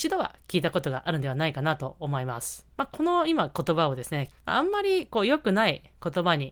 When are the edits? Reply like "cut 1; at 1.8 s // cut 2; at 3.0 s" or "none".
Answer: cut 1; at 2.7 s // cut 2; at 4.3 s